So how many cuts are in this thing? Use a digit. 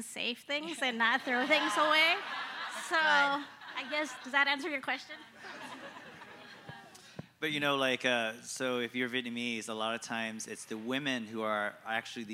0